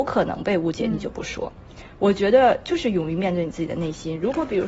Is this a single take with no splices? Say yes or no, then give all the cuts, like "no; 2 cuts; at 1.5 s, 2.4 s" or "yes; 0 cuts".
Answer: yes; 0 cuts